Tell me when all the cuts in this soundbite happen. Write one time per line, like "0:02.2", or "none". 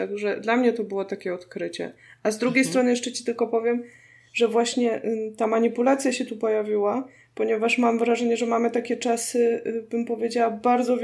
none